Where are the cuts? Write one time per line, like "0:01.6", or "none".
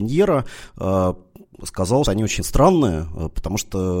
0:02.0